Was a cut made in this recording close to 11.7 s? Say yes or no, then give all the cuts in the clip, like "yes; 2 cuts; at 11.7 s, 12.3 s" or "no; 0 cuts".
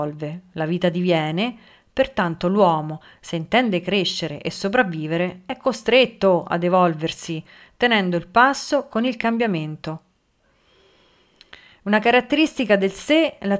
no; 0 cuts